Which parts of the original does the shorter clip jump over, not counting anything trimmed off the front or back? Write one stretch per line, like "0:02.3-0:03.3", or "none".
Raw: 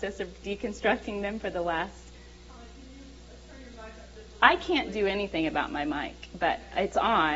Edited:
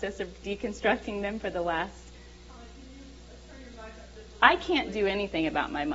none

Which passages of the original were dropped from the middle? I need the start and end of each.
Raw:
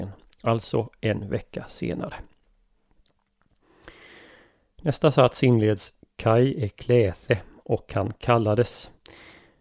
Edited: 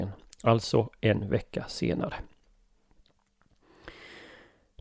none

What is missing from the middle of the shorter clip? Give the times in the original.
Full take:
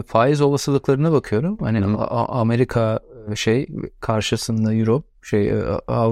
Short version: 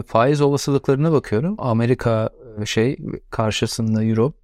0:01.6-0:02.3

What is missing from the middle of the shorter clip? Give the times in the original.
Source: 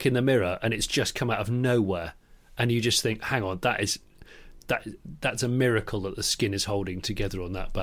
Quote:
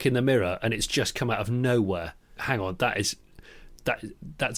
0:02.4-0:03.2

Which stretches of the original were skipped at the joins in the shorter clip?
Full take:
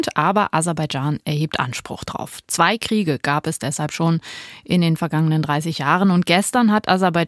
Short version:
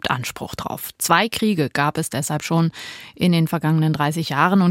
none

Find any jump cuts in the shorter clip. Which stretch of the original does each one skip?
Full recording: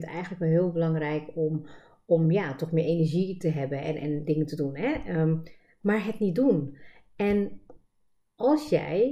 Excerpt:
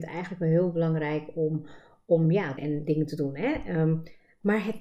0:02.6-0:04.0

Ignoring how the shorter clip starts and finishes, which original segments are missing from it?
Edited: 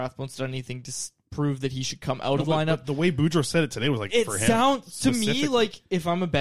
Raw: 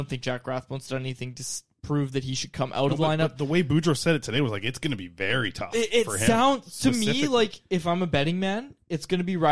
0:04.6-0:05.9

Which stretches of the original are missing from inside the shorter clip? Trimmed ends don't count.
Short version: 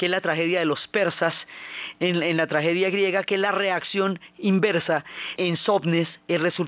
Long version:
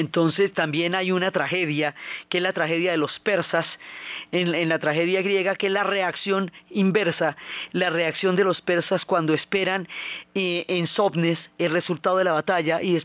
0:07.7-0:10.7

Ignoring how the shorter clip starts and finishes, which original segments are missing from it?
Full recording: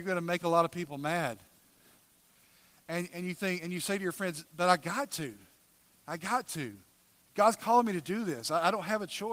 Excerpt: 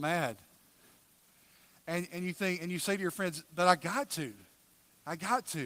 none

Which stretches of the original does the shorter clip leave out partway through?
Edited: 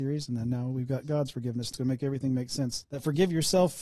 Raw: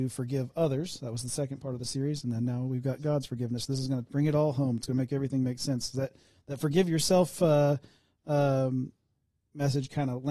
0:03.7-0:04.8
0:05.9-0:06.4

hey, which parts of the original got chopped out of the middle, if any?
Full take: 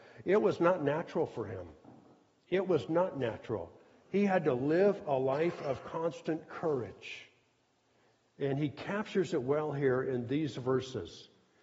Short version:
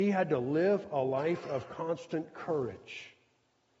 none

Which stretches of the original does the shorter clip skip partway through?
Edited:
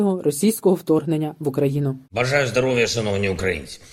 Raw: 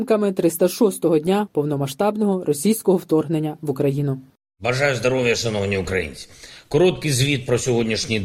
0:04.3-0:04.5

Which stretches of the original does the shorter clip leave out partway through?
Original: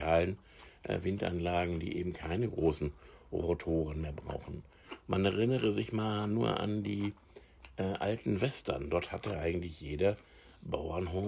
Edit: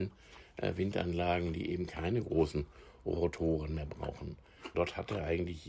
0:05.0-0:08.9

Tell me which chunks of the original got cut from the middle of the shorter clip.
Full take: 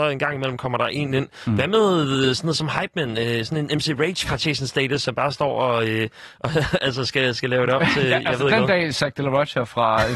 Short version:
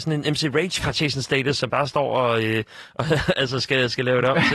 none

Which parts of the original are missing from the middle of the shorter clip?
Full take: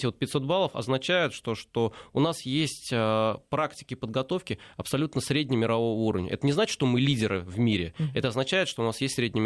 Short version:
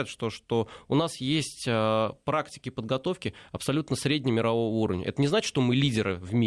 none

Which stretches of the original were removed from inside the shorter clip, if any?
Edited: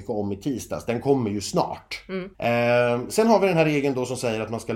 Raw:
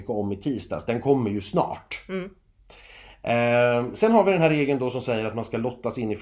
0:02.3-0:03.2

